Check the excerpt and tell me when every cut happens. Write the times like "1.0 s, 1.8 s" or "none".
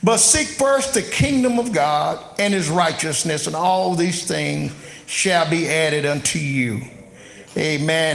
none